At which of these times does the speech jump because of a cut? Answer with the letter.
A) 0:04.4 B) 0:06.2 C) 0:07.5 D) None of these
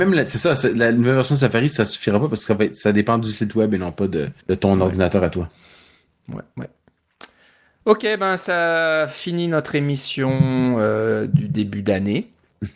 A